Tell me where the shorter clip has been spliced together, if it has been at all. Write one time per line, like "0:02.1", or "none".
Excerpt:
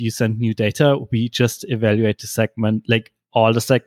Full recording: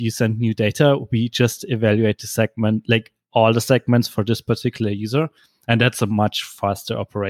none